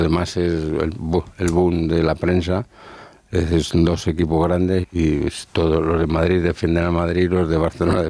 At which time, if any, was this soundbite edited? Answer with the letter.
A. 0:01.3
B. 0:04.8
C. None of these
B